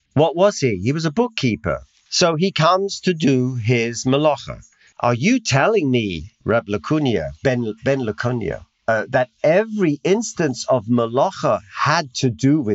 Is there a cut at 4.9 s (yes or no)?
yes